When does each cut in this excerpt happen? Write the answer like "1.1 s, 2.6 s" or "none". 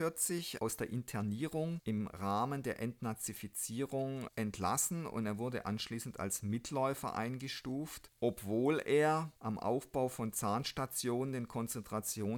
none